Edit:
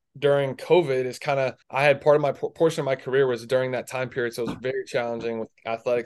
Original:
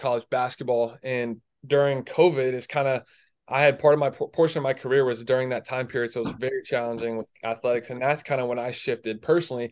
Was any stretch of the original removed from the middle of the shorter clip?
yes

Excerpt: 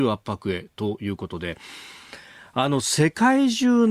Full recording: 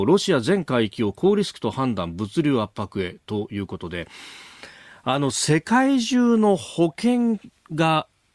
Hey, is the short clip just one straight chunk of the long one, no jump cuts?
yes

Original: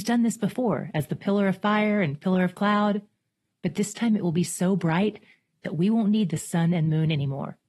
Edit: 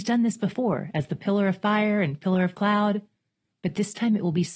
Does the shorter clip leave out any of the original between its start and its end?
no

